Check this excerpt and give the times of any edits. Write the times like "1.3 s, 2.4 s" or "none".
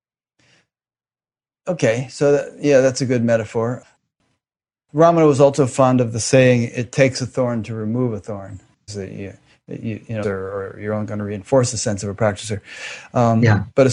8.9 s, 10.2 s